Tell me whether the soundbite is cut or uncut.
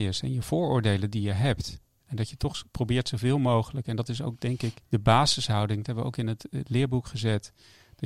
uncut